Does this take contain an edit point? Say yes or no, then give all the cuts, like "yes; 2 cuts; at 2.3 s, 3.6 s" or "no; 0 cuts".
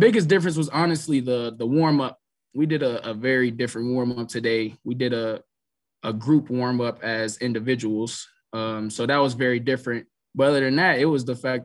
no; 0 cuts